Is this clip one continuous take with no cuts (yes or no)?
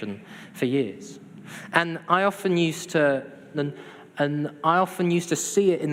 no